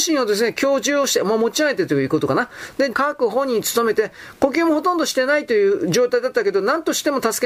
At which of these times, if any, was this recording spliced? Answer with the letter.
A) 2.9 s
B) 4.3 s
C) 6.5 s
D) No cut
A